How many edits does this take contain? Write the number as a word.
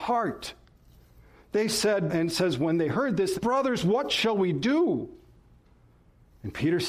two